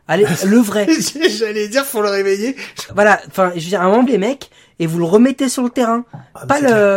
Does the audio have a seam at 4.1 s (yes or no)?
yes